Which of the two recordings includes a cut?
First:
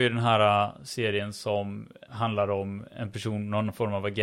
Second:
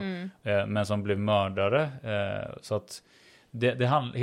first; 1 cut; at 2.1 s

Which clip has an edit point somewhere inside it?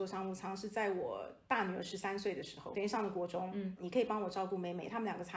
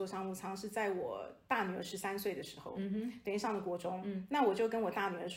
first; 2 cuts; at 2.7 s, 3.8 s

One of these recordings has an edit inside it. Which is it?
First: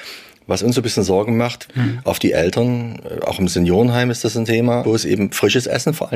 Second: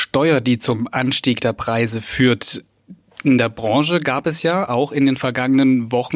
first; 2 cuts; at 1.7 s, 4.8 s

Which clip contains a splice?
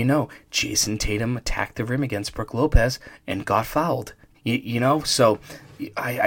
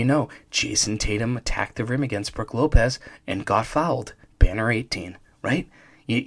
first; 1 cut; at 4.3 s

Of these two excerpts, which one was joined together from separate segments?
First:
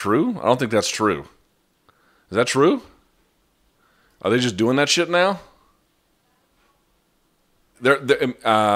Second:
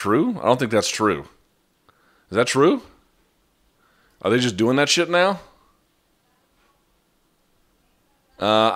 first; 1 cut; at 7.7 s

